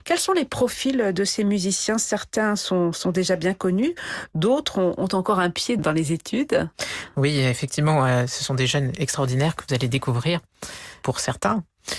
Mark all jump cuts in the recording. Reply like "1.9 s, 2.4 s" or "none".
5.8 s